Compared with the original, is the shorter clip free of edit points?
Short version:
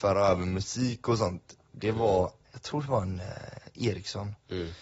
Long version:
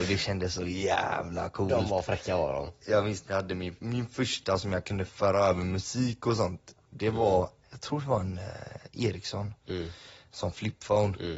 yes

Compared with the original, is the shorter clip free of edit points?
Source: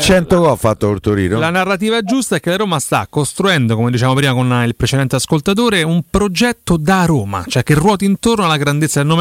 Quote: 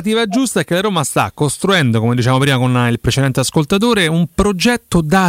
yes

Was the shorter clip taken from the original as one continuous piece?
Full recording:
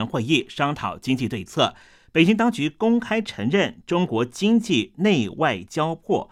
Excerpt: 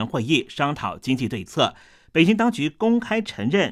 yes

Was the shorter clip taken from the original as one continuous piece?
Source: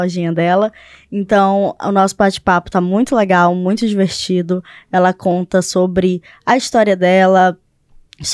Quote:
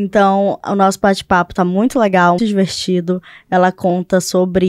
no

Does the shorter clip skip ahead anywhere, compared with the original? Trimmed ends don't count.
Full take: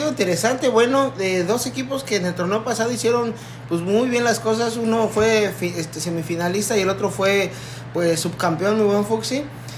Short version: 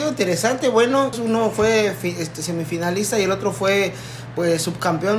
yes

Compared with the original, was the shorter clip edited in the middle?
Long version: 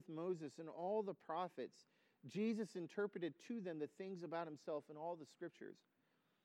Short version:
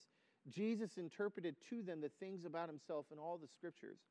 no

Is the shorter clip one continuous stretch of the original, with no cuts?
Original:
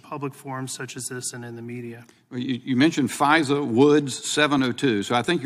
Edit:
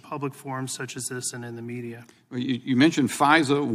yes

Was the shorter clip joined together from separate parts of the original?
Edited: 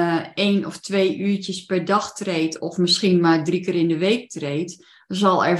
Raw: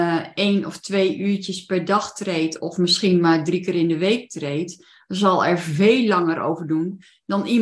no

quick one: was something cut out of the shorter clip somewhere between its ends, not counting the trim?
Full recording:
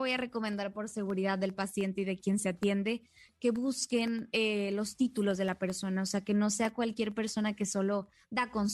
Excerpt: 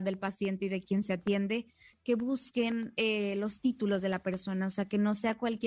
no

